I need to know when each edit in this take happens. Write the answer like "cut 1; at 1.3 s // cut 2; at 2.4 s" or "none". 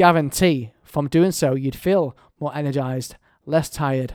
none